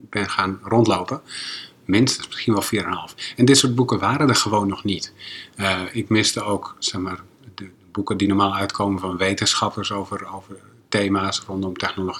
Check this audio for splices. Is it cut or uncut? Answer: uncut